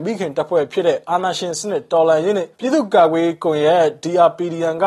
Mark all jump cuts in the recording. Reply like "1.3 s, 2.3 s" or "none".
2.5 s